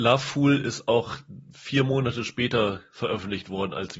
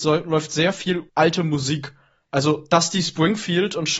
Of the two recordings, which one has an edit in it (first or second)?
second